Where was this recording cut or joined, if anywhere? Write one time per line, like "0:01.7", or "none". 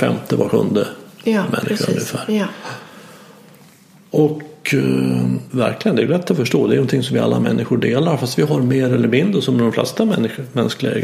0:05.5